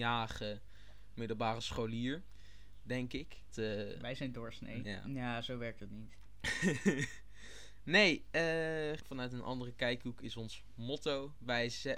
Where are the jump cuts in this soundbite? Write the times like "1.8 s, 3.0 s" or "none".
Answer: 3.5 s, 4.8 s, 9.0 s